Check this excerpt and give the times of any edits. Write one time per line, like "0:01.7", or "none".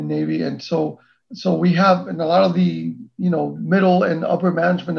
none